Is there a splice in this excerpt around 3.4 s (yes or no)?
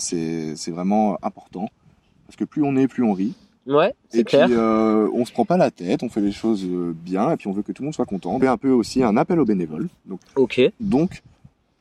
no